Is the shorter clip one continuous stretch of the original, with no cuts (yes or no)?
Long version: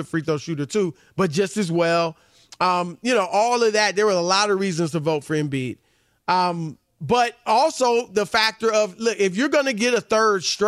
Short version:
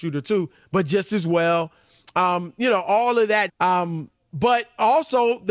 no